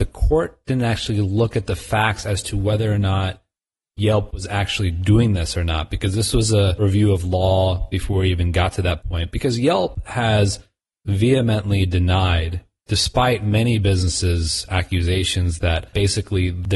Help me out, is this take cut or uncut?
uncut